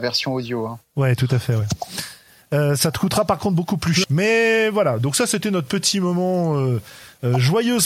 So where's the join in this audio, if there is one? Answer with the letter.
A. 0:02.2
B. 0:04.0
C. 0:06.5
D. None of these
B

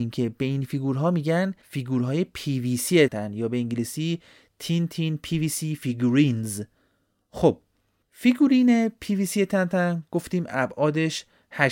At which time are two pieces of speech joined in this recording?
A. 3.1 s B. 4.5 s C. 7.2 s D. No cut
A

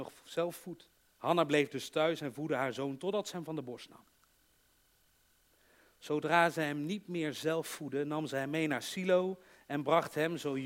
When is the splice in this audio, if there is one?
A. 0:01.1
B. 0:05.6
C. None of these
A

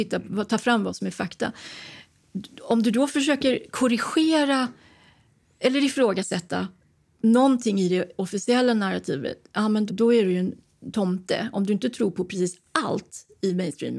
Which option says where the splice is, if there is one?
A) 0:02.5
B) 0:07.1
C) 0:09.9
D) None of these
C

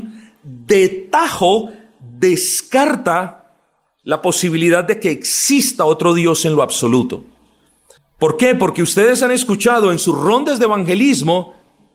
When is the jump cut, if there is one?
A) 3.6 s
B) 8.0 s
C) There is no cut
B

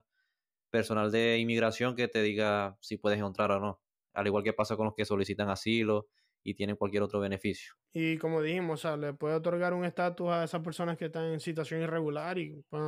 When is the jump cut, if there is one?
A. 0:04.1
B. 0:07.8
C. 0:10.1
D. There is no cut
B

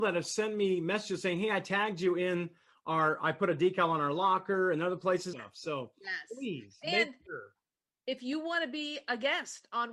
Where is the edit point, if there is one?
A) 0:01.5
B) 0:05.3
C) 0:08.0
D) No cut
B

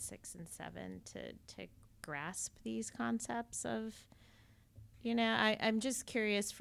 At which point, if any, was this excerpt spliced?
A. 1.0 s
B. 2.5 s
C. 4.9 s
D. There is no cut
C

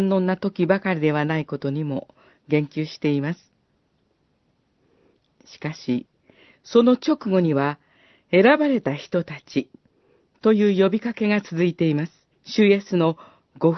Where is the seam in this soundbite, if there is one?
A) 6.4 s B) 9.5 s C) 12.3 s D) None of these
C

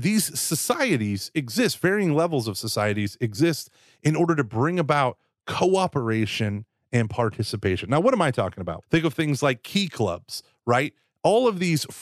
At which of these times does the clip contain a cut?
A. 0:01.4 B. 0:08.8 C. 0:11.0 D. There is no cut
B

